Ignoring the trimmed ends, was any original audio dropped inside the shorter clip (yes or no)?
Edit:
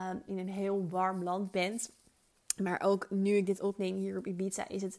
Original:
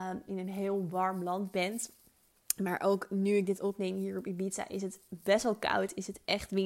no